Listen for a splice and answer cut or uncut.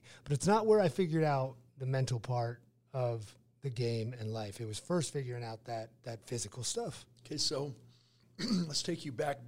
uncut